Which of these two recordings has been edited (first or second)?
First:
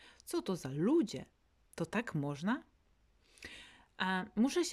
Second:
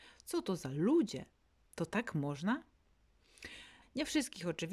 second